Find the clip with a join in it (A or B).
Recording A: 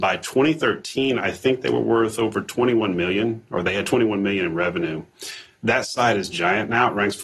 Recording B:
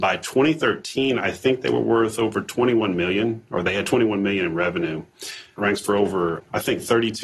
B